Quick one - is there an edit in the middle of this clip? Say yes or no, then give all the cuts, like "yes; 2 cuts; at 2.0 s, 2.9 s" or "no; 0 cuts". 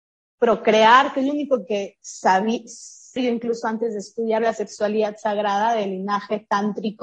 yes; 1 cut; at 3.2 s